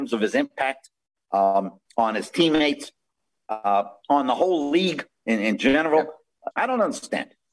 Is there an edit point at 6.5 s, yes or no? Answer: yes